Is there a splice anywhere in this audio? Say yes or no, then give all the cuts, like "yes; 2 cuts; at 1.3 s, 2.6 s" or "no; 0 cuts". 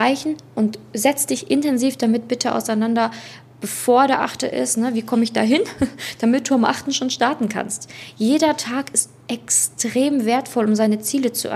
no; 0 cuts